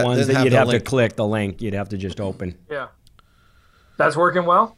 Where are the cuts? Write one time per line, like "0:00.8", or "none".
none